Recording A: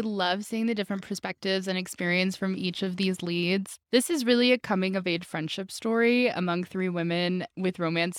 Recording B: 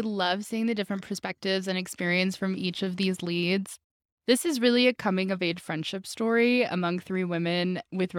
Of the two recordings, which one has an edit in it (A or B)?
A